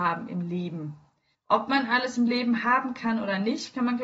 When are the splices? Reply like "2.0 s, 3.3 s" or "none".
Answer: 1.3 s